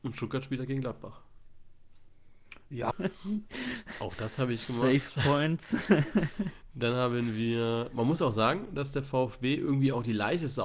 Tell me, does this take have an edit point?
yes; 1 cut; at 2.9 s

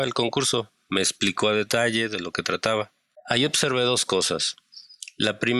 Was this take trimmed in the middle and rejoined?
yes; 1 cut; at 3.2 s

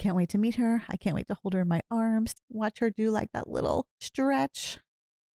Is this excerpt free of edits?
no; 2 cuts; at 2.3 s, 3.9 s

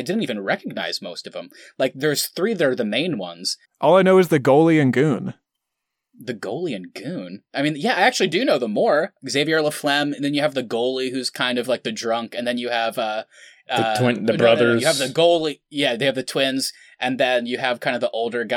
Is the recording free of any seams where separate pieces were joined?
no; 1 cut; at 3.6 s

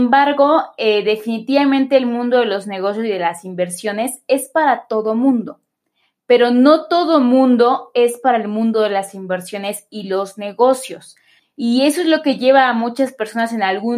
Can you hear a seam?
yes; 1 cut; at 11.4 s

